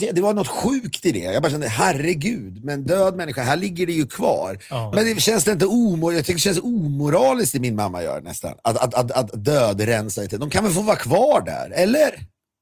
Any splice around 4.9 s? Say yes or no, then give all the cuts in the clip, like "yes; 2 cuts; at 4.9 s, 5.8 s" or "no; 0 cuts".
yes; 1 cut; at 4.9 s